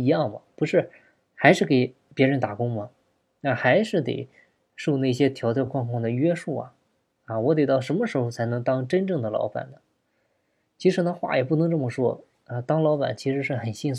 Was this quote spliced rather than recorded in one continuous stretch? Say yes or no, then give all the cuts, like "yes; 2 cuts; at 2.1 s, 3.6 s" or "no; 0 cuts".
no; 0 cuts